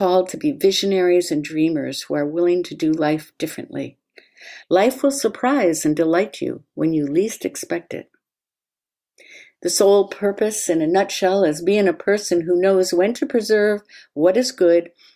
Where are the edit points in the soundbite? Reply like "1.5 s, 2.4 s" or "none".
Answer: 4.6 s